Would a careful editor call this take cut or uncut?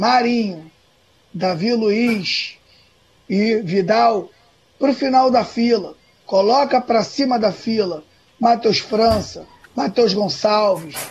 cut